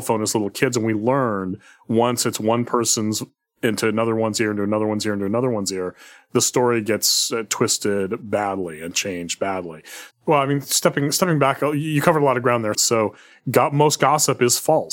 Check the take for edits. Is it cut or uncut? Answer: cut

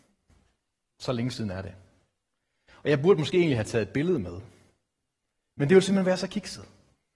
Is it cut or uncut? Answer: uncut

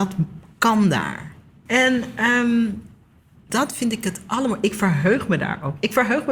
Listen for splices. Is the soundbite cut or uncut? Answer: cut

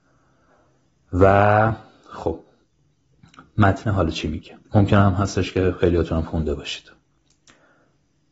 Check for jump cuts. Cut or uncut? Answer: cut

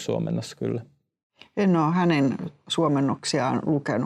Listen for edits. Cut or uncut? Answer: uncut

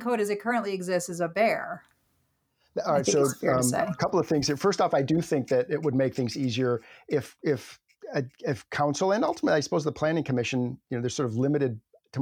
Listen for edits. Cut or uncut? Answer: uncut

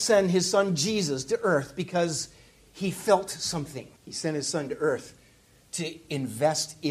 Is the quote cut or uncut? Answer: cut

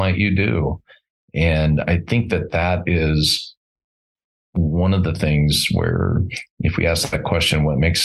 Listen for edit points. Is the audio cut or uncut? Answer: uncut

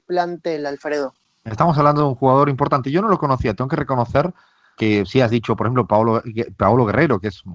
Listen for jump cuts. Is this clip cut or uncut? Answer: cut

